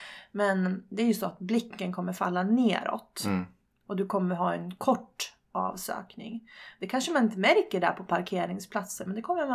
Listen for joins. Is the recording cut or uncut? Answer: uncut